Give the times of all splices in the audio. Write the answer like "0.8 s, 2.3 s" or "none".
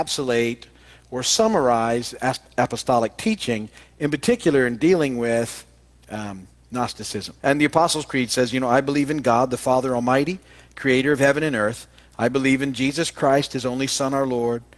7.4 s